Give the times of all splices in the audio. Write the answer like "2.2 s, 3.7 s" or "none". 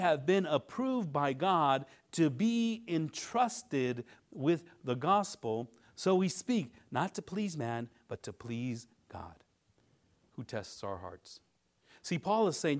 none